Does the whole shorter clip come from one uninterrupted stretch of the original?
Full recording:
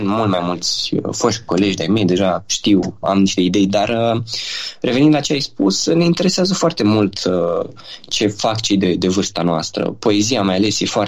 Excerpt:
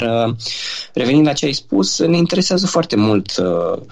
yes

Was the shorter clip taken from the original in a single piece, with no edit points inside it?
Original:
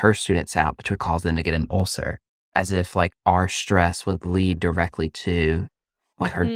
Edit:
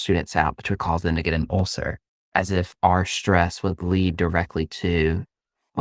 no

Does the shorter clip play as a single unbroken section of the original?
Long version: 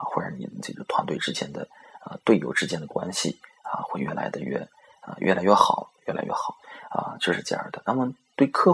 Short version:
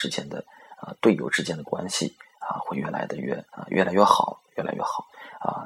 no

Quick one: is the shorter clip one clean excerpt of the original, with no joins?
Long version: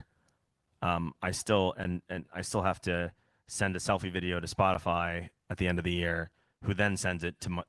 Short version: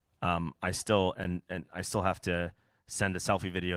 yes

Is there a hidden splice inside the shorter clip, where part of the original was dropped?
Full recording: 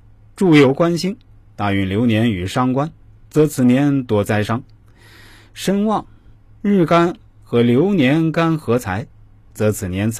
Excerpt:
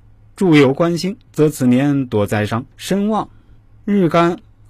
yes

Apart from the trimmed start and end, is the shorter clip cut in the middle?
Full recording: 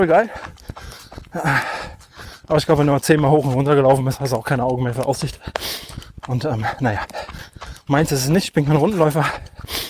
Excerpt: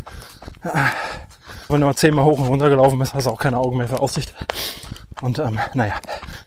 yes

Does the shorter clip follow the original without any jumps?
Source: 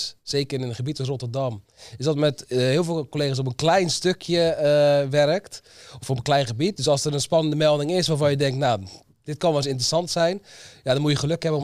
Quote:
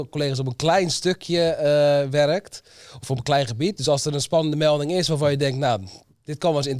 yes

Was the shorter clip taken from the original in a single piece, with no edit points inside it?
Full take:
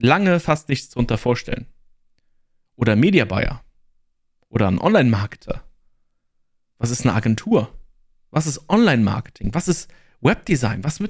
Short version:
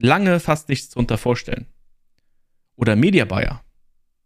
yes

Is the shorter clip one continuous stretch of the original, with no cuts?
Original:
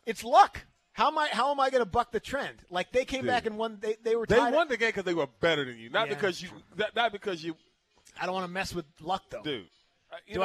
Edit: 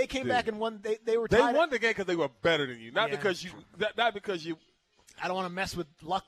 yes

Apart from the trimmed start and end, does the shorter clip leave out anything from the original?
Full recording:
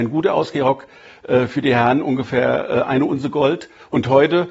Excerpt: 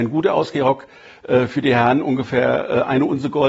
no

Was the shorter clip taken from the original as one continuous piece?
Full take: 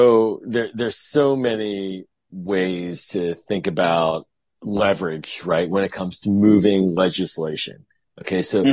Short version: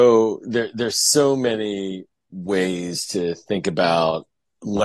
yes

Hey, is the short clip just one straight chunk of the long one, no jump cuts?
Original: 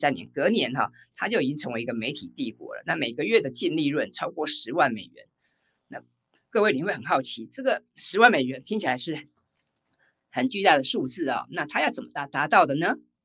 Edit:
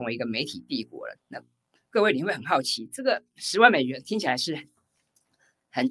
no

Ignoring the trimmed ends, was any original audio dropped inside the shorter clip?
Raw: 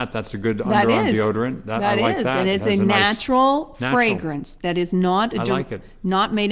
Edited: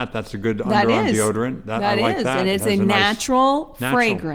no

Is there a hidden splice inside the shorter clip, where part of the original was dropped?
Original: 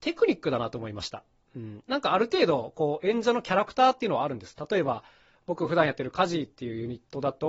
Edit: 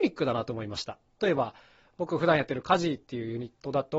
yes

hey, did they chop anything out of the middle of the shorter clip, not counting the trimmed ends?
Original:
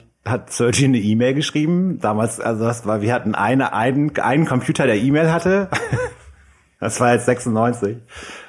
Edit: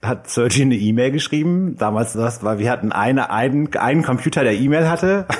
yes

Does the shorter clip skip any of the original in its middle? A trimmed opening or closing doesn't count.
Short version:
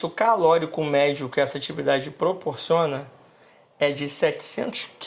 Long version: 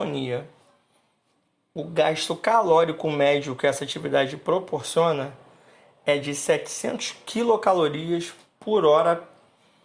no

